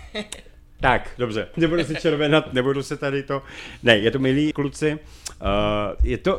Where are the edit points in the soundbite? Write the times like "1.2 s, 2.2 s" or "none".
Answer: 1.5 s, 4.5 s